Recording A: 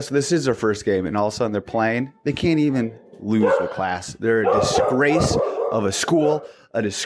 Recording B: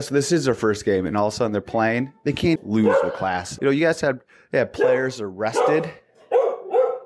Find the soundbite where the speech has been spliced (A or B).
B